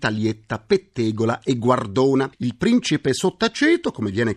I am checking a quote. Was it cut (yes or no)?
no